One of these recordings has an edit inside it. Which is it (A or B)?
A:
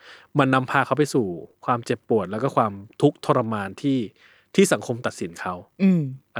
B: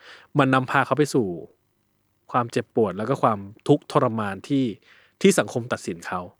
A